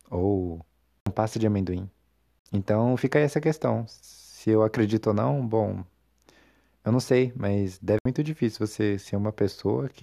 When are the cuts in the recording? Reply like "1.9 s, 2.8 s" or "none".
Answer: none